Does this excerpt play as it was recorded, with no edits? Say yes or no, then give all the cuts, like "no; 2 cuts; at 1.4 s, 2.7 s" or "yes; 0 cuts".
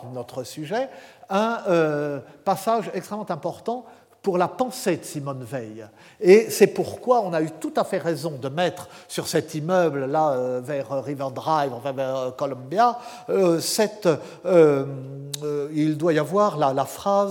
yes; 0 cuts